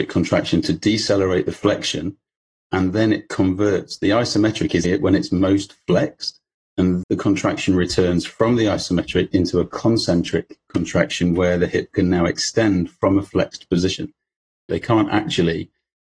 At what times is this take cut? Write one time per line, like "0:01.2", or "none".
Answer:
0:04.8
0:07.0
0:14.7